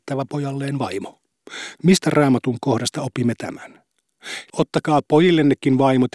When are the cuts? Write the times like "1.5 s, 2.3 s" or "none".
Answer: 1.8 s, 4.5 s